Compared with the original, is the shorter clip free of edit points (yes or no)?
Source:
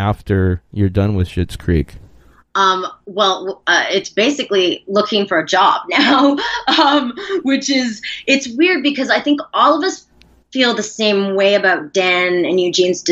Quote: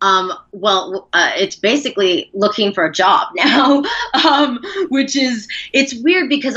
yes